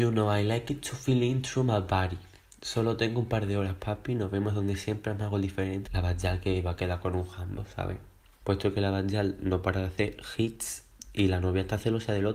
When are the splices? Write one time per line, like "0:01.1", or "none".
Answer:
0:05.9
0:08.4